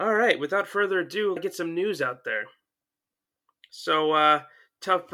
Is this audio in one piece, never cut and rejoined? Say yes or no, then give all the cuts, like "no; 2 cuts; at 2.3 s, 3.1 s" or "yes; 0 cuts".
no; 1 cut; at 1.4 s